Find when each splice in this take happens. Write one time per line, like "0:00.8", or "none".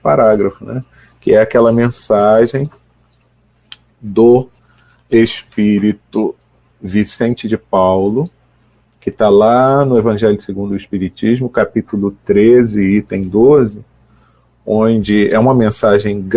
none